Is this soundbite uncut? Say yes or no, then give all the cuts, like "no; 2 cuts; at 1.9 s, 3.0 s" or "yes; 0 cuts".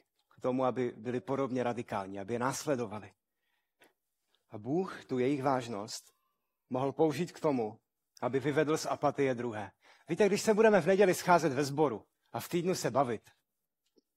yes; 0 cuts